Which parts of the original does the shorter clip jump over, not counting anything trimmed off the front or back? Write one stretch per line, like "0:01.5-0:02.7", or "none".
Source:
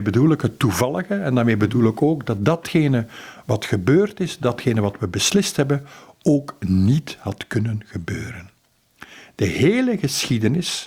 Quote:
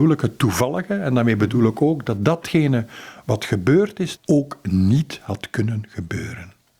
0:04.4-0:06.1